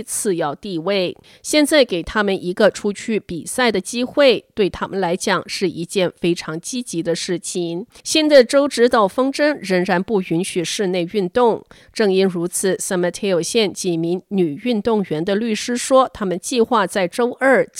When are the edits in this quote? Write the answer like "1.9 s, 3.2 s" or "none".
8.0 s